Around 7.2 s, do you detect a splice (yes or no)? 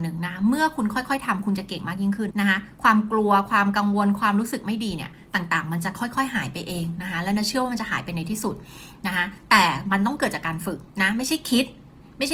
no